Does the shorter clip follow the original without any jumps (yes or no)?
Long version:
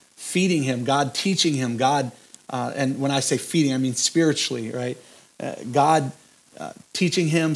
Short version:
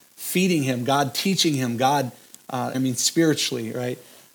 no